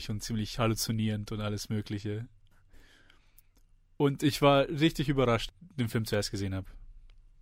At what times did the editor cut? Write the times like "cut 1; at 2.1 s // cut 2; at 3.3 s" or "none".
cut 1; at 5.5 s